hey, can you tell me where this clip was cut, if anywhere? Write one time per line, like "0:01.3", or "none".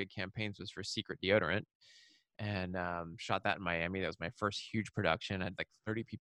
none